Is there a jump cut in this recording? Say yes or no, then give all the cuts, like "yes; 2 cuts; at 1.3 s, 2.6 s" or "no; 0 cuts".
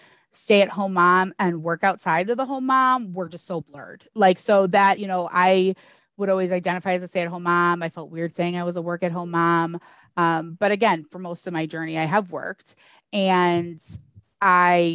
no; 0 cuts